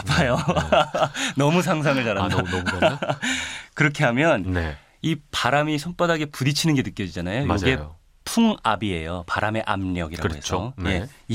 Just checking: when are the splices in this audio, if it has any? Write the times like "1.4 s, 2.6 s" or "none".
none